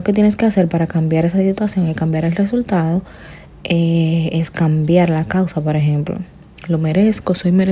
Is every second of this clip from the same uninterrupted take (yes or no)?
yes